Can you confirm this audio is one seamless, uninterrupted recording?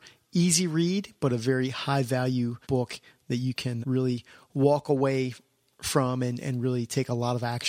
no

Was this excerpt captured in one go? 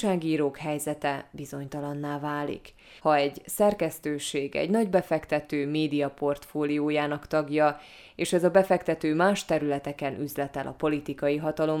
no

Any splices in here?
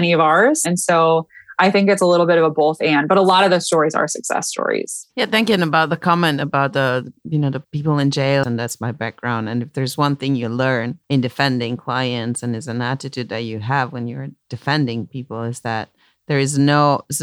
yes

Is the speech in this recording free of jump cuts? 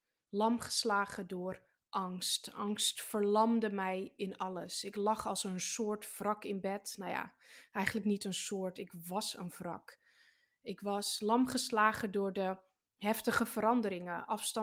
yes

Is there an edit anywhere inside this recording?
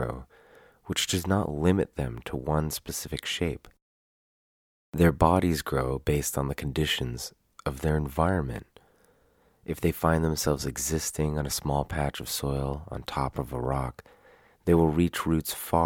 no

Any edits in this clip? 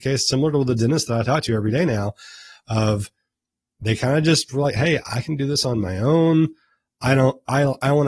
no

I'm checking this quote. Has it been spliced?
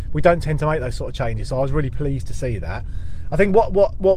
no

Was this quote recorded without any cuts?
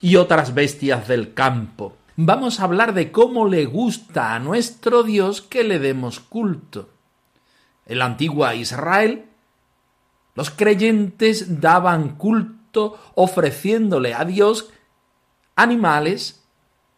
no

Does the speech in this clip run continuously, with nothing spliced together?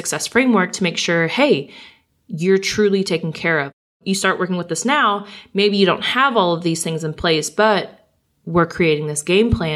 yes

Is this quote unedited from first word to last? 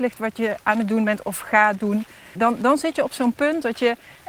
no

